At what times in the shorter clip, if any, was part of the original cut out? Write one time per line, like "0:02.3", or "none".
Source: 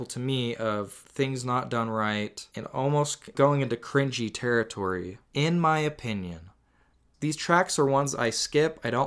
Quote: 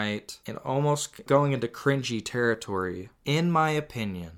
none